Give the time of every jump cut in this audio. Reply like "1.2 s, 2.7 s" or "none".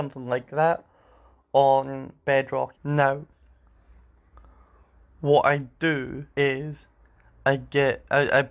2.7 s, 6.3 s